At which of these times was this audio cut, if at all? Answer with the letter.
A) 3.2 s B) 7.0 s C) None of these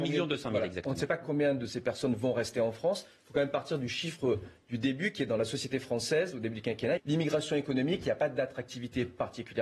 B